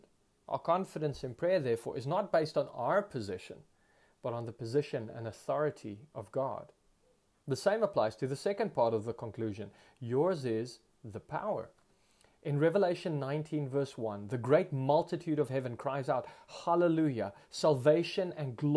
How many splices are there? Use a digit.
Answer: 0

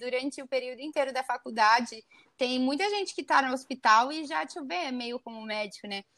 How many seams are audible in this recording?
0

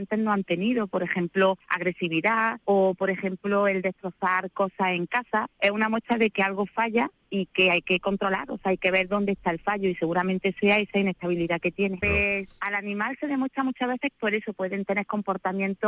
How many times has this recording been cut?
2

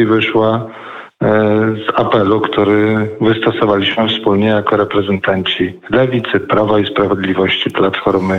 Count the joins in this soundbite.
0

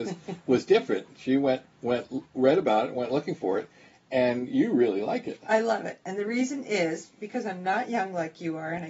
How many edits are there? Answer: 0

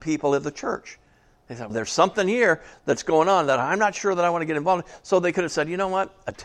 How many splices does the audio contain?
1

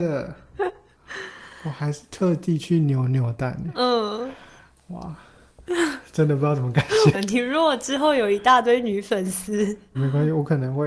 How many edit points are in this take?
2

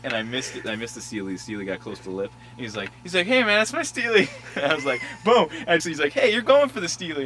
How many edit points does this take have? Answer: 1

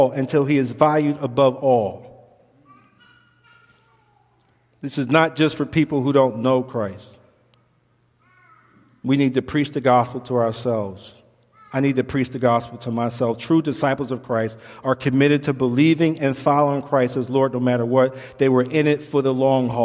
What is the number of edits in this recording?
0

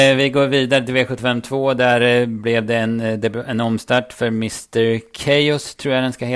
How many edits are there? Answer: 0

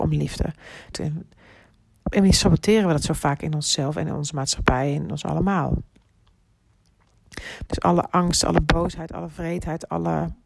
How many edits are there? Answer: 2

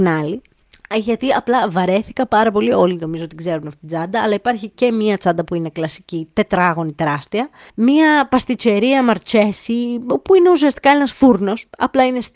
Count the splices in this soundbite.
1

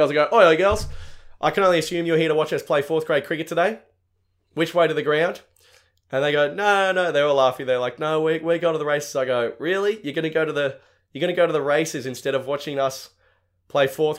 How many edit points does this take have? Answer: 0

